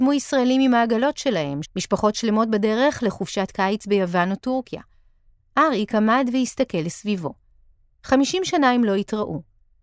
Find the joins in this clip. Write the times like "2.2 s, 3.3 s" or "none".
1.6 s, 8.0 s